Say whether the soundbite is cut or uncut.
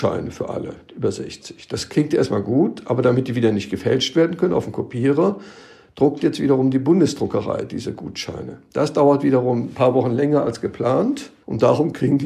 uncut